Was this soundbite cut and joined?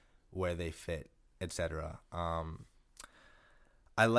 no; 0 cuts

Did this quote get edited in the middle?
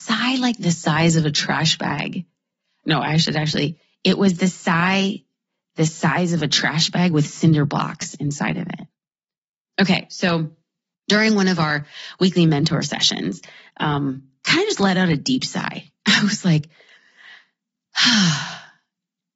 yes; 1 cut; at 9.7 s

